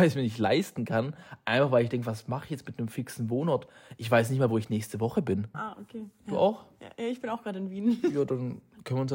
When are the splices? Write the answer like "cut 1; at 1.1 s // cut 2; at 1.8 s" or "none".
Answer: cut 1; at 5.5 s